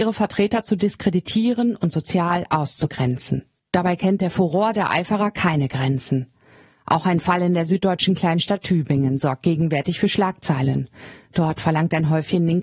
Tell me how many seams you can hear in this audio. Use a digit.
0